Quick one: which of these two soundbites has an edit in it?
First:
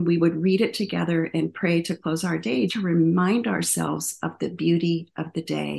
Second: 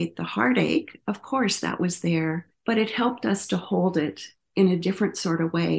first; 1 cut; at 2.7 s

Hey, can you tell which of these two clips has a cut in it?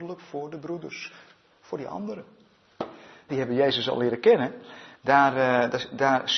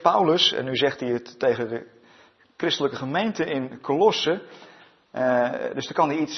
first; 2 cuts; at 3.3 s, 4.9 s

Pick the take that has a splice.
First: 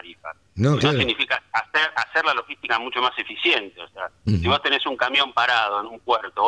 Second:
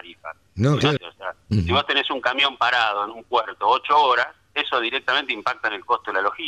second; 1 cut; at 1.0 s

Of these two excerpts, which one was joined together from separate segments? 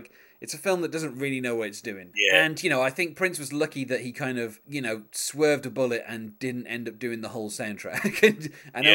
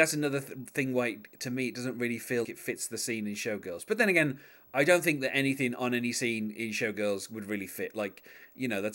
second; 1 cut; at 2.4 s

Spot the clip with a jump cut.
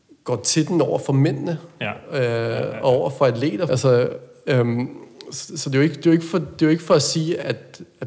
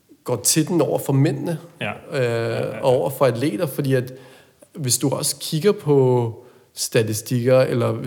first; 1 cut; at 3.7 s

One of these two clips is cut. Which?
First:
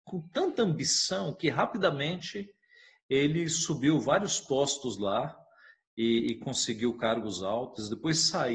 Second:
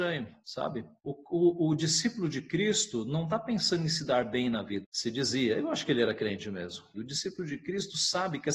second; 3 cuts; at 1.0 s, 4.8 s, 6.9 s

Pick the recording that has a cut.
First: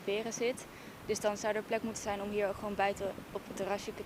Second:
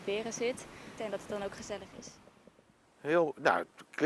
second; 1 cut; at 1.0 s

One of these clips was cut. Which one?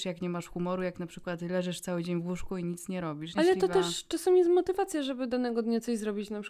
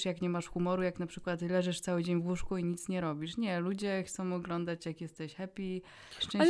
first; 1 cut; at 3.3 s

